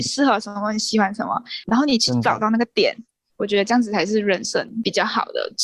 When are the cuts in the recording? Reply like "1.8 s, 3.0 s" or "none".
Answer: 3.3 s